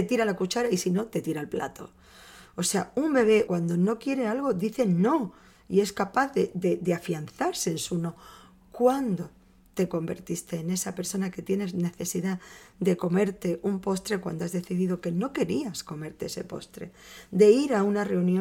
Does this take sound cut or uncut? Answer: cut